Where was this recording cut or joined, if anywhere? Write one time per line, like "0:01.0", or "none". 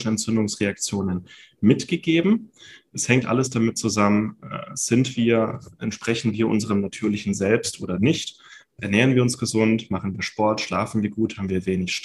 0:03.2